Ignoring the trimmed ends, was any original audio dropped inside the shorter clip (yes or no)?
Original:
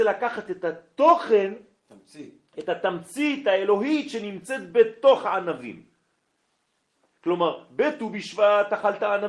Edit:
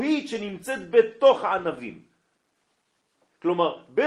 no